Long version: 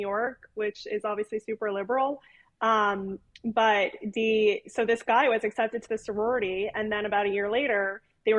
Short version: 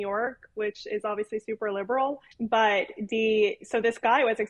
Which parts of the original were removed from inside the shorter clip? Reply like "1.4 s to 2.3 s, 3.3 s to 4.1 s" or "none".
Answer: 2.3 s to 3.4 s